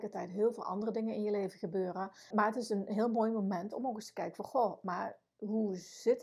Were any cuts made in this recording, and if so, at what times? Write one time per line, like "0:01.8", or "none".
0:02.3

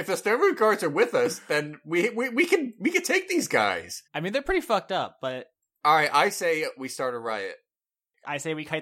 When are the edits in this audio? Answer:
0:04.1

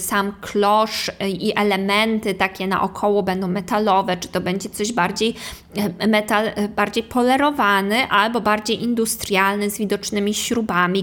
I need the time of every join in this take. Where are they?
none

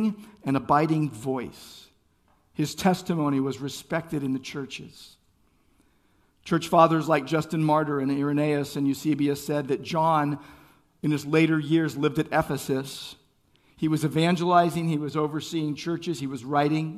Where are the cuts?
none

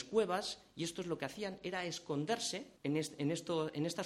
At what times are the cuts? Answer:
0:02.8

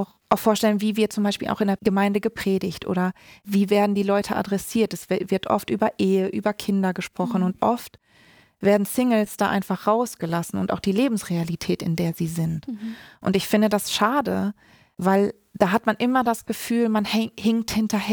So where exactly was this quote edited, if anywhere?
none

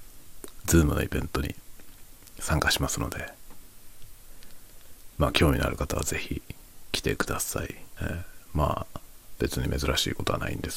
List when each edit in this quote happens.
0:08.0

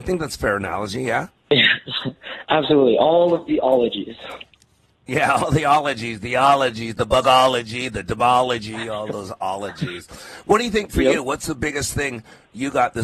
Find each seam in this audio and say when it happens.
none

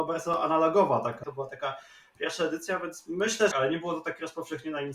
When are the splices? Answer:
0:01.2
0:03.5

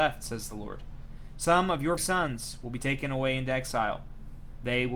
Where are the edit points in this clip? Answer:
0:02.0

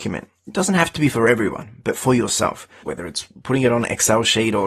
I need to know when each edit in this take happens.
0:02.8

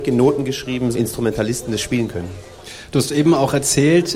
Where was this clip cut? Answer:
0:00.9

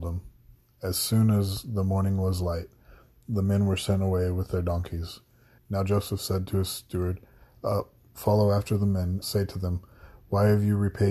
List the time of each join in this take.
0:05.6
0:09.2

